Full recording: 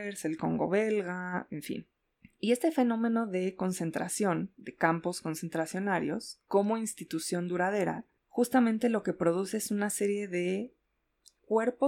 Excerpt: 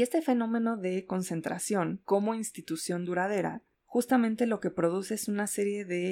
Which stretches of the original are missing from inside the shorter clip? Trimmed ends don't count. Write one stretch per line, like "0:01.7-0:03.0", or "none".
0:04.5-0:06.5